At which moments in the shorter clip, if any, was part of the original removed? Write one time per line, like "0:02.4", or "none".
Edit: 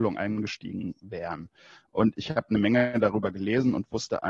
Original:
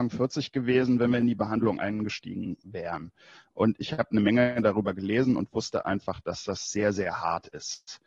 none